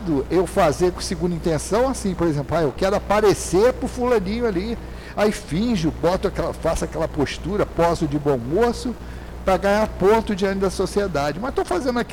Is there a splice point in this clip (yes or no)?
no